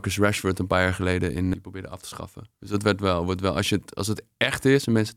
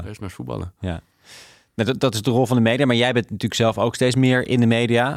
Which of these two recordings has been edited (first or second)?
first